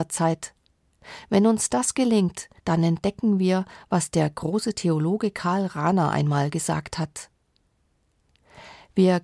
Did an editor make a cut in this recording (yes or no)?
yes